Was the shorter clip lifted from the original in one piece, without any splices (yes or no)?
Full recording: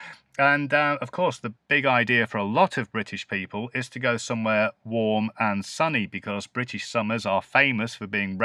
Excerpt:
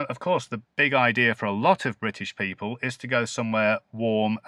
yes